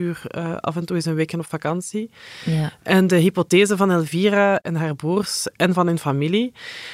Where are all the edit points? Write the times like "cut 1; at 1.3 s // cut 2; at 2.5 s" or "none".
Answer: none